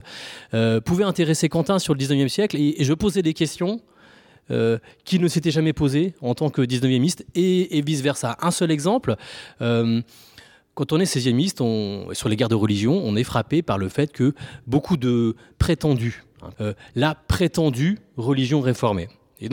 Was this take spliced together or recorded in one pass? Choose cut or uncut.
cut